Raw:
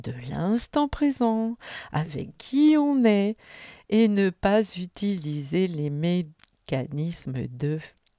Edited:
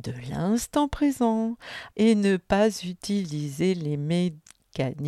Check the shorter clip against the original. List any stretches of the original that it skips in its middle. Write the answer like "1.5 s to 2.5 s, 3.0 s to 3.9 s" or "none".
1.9 s to 3.8 s